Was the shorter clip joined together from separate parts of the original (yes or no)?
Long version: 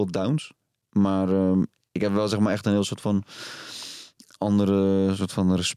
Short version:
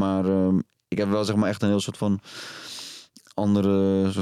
no